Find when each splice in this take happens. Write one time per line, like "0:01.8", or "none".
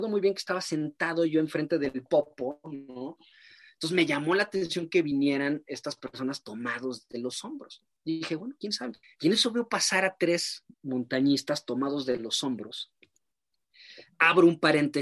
0:03.2
0:09.0
0:10.7